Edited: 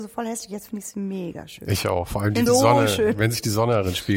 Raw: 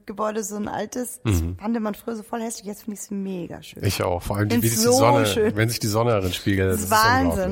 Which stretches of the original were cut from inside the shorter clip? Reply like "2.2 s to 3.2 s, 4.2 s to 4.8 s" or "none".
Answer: 4.6 s to 4.8 s